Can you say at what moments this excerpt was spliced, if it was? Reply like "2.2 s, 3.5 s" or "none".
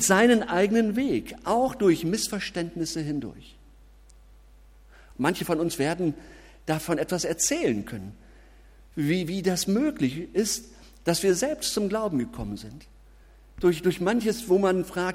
none